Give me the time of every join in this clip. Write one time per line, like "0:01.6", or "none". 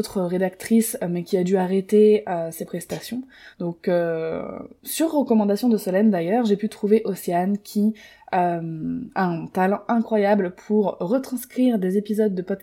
none